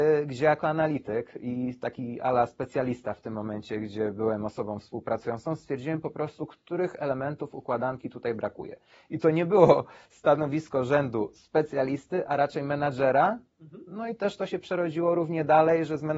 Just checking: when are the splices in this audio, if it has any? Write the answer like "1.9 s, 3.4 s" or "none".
none